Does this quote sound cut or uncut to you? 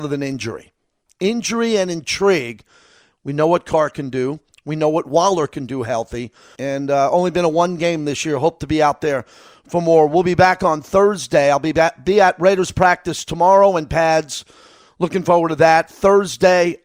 cut